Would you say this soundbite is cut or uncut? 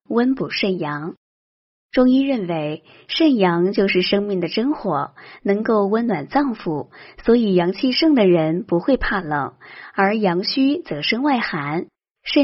uncut